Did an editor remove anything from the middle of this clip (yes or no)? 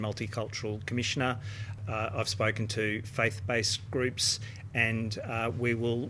no